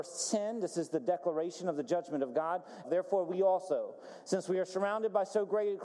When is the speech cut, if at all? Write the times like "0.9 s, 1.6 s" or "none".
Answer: 2.8 s